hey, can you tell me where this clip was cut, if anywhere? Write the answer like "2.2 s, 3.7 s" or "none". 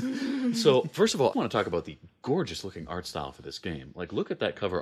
1.3 s